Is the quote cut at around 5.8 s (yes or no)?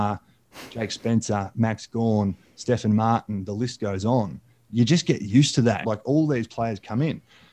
yes